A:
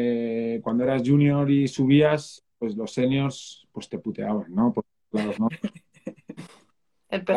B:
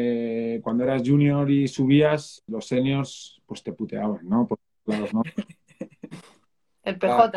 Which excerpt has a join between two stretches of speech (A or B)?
B